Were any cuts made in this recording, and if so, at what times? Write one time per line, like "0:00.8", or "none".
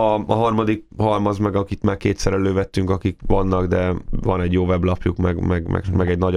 none

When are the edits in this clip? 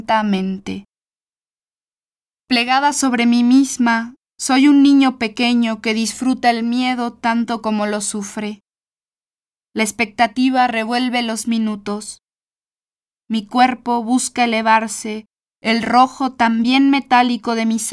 0:02.4

